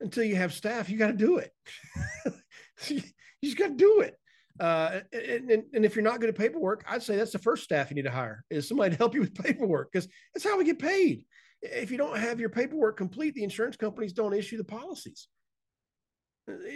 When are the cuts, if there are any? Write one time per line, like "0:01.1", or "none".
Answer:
none